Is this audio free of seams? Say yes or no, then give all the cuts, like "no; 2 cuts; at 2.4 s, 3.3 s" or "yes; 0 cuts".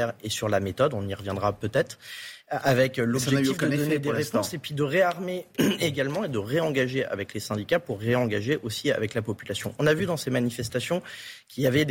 yes; 0 cuts